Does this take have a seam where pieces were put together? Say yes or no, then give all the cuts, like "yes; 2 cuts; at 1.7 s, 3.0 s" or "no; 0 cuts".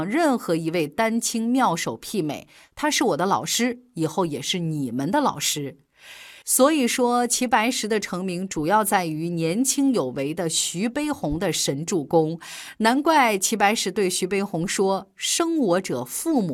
no; 0 cuts